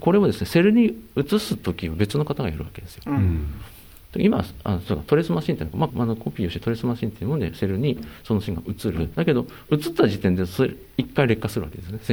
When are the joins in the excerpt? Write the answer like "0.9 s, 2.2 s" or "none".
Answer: 5.9 s, 9.1 s